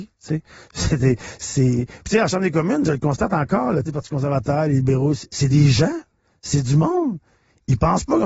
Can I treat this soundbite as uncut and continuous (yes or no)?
no